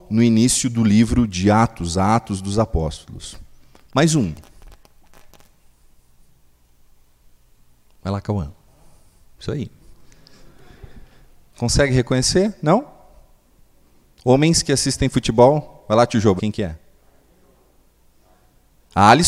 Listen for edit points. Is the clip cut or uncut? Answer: cut